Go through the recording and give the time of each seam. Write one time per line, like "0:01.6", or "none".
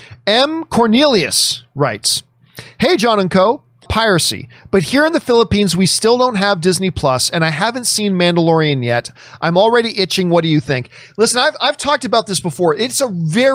0:03.9